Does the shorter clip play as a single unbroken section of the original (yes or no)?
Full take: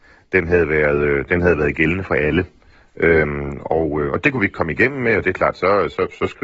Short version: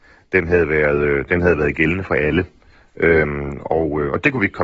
yes